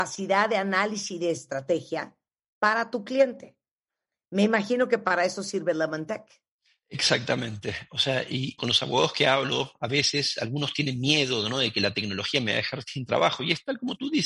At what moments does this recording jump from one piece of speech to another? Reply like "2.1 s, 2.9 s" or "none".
8.6 s